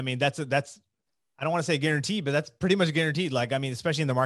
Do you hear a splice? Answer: no; 0 cuts

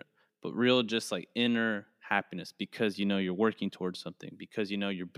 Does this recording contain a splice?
no; 0 cuts

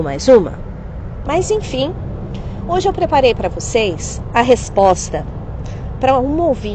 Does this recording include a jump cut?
yes; 1 cut; at 1.2 s

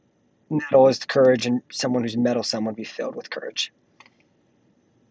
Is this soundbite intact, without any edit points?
yes; 0 cuts

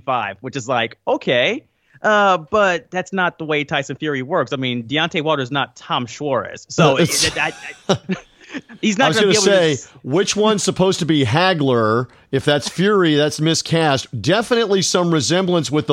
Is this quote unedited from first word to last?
yes; 0 cuts

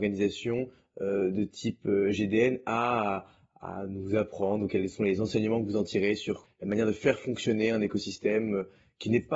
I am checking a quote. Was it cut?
no; 0 cuts

